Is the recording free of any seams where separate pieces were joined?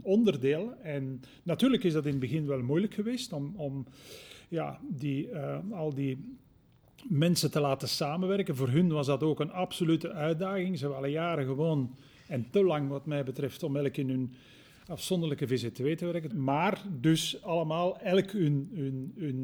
no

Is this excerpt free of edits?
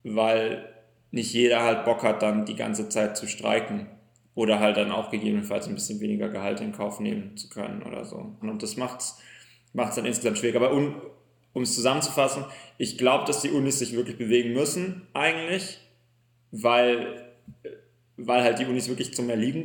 no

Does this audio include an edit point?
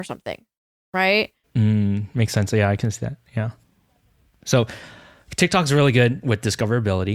yes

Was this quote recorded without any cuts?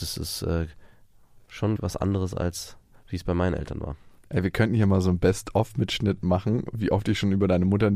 no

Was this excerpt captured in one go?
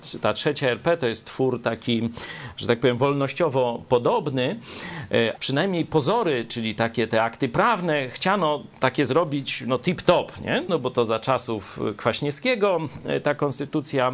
no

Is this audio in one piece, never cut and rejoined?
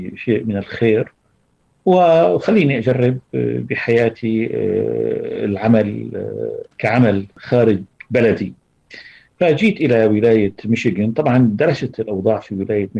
no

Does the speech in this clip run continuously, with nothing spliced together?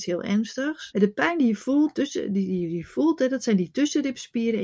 no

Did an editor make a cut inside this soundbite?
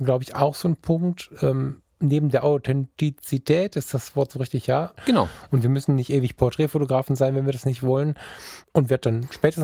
yes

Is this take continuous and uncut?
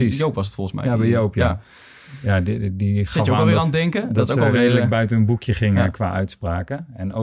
yes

